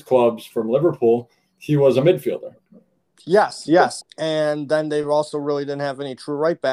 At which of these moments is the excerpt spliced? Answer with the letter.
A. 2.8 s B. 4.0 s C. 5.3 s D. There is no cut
B